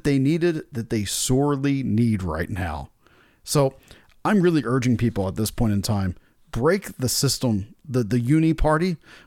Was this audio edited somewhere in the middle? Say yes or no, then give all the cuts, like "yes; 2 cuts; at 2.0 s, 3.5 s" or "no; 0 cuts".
no; 0 cuts